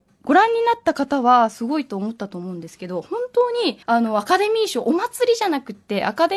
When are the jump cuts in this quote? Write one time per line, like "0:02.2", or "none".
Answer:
0:03.8